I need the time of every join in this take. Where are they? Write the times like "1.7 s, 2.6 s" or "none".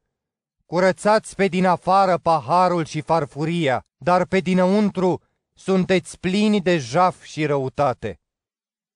3.9 s